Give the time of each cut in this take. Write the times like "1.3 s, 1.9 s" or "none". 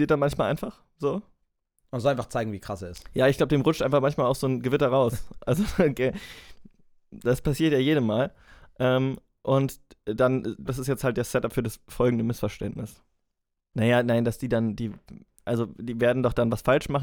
10.7 s, 13.7 s